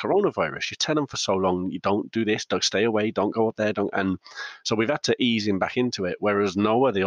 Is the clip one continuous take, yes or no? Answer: yes